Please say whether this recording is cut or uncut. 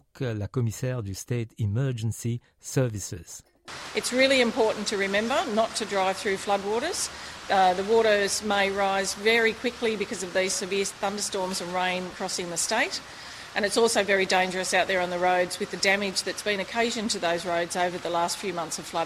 uncut